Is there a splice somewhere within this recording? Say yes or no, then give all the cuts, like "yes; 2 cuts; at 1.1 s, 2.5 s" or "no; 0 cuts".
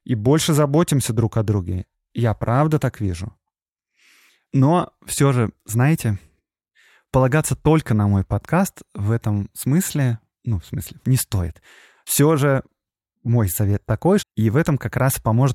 yes; 2 cuts; at 11.0 s, 14.2 s